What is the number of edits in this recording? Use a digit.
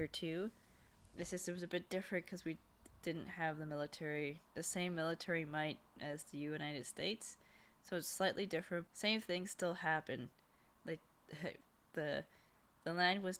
1